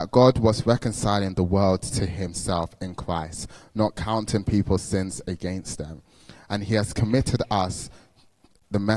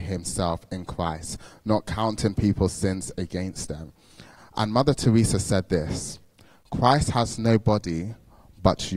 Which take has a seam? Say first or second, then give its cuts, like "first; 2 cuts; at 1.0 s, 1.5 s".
second; 1 cut; at 4.4 s